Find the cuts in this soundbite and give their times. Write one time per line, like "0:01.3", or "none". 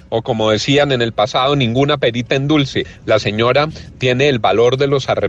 0:03.0